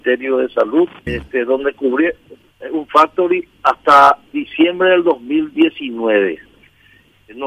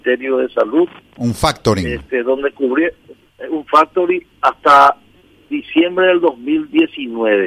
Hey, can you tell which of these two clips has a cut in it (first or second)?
first